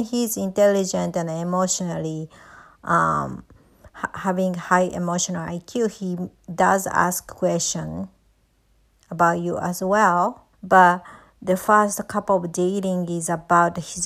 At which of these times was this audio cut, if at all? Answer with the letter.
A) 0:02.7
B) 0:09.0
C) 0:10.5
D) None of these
C